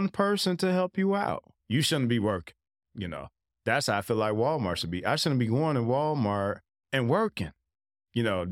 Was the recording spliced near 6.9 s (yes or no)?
yes